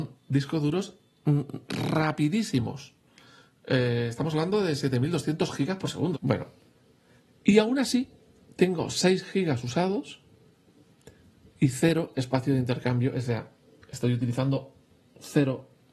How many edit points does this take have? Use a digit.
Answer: 1